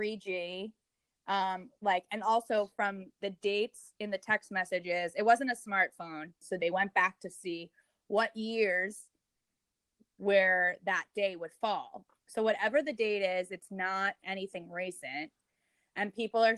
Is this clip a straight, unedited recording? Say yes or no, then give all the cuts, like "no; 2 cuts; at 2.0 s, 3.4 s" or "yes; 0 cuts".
no; 2 cuts; at 6.4 s, 12.1 s